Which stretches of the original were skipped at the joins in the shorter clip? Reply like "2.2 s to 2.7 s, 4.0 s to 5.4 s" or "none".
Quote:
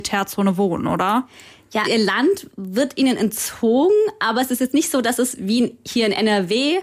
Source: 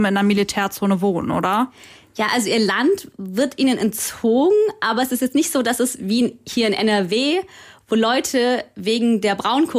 2.3 s to 2.5 s